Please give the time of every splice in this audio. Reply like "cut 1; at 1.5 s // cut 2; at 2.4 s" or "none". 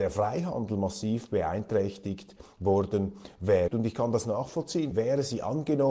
cut 1; at 3.7 s // cut 2; at 4.9 s